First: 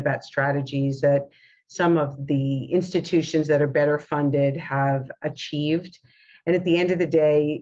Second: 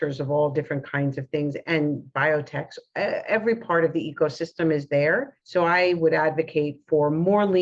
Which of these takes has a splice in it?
second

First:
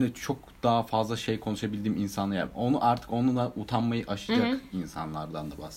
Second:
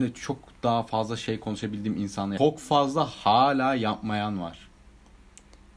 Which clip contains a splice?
second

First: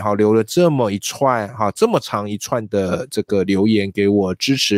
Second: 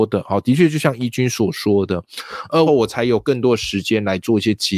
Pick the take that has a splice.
second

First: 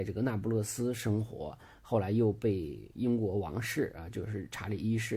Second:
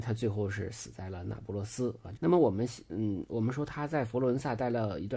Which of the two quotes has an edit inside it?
second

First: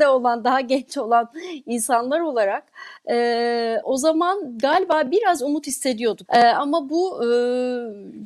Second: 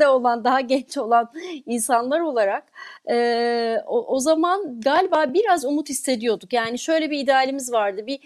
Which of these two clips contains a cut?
first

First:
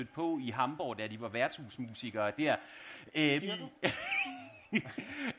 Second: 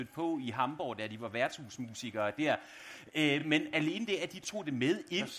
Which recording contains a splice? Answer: first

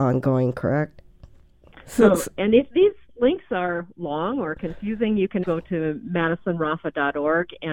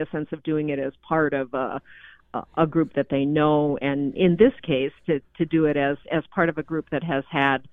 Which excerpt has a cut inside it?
first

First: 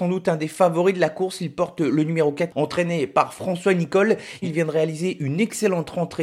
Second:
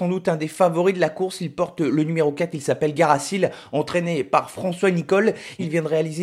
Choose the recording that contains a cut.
first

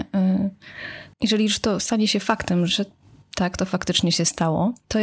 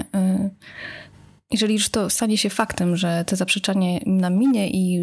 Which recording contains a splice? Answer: first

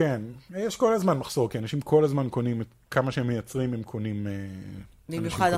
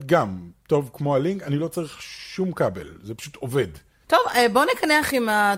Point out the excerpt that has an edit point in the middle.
second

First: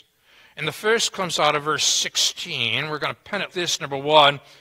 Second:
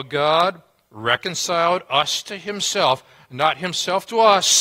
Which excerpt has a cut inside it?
first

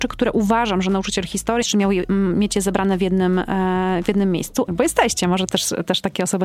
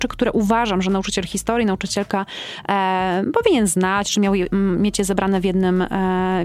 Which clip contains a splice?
first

